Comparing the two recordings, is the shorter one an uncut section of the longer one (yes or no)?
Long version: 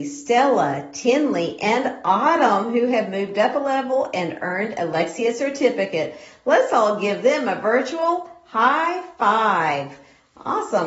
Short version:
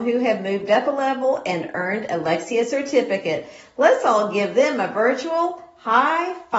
yes